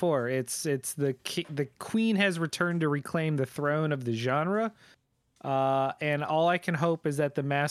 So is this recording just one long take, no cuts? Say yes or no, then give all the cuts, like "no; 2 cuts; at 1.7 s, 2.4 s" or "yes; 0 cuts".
yes; 0 cuts